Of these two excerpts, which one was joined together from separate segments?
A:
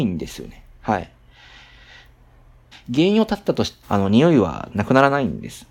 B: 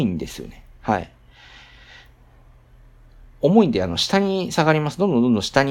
A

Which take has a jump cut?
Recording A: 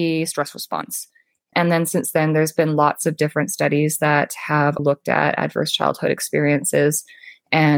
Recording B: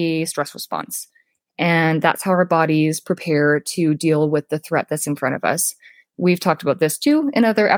A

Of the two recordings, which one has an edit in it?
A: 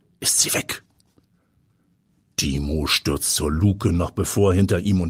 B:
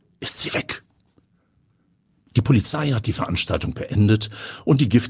B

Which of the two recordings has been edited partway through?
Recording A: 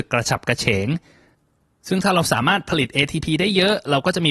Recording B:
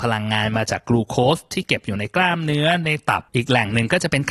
B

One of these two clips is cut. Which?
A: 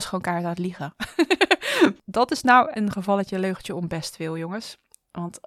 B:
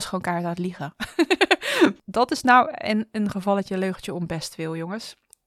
A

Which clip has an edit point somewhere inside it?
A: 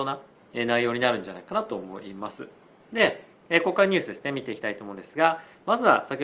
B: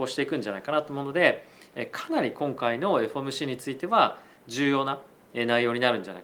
A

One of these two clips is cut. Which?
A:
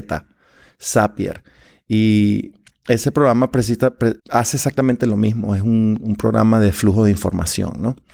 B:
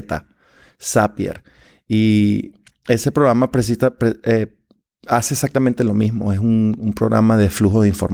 A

